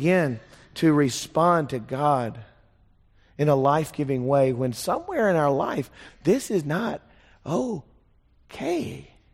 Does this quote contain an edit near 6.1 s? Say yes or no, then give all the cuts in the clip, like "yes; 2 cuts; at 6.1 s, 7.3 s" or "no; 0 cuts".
yes; 1 cut; at 6.1 s